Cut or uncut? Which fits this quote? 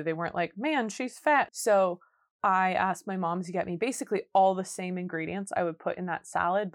cut